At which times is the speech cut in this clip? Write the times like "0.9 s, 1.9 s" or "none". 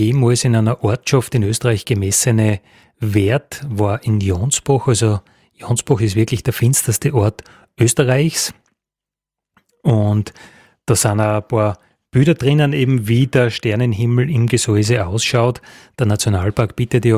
none